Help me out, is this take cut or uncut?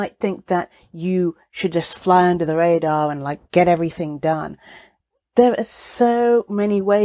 uncut